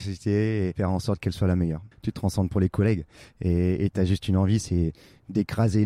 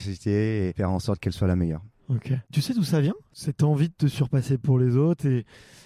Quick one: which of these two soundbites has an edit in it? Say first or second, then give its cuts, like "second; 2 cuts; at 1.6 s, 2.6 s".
first; 1 cut; at 1.9 s